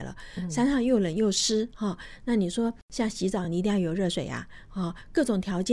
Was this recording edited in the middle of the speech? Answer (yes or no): no